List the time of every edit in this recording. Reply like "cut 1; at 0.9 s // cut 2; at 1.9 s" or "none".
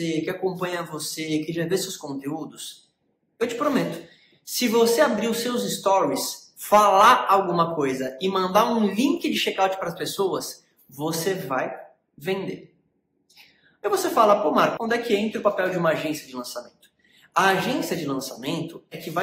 cut 1; at 14.8 s